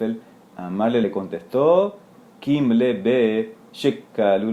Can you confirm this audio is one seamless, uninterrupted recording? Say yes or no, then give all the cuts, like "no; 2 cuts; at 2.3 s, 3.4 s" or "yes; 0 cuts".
yes; 0 cuts